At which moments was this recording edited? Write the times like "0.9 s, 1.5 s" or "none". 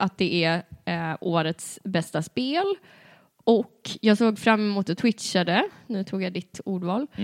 none